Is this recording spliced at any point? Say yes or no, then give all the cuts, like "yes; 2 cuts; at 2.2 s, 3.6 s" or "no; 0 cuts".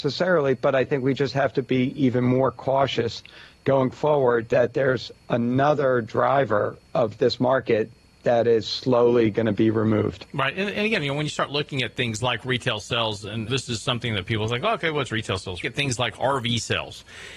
yes; 2 cuts; at 13.5 s, 15.6 s